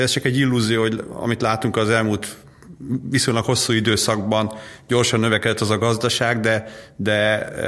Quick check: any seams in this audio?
no; 0 cuts

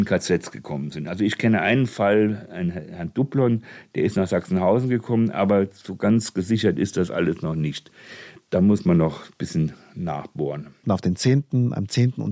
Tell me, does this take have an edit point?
yes; 1 cut; at 10.8 s

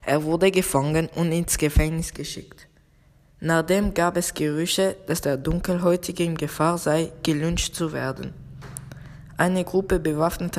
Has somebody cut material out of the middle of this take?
no; 0 cuts

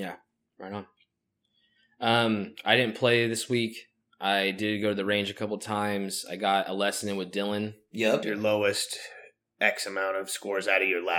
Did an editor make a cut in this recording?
yes; 1 cut; at 8.2 s

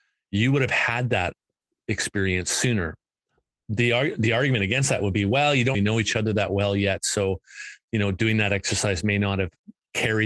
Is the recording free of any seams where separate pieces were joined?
no; 1 cut; at 5.7 s

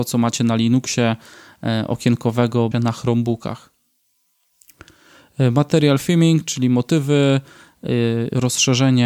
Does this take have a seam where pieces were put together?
yes; 1 cut; at 2.7 s

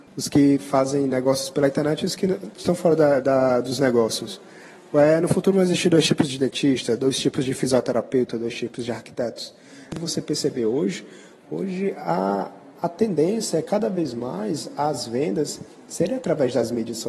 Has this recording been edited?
no; 0 cuts

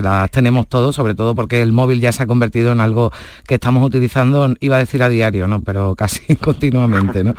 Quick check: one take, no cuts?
yes; 0 cuts

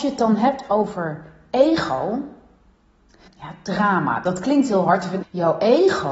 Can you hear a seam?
yes; 2 cuts; at 3.3 s, 5.2 s

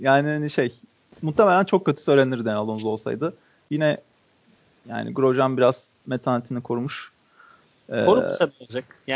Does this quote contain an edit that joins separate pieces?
no; 0 cuts

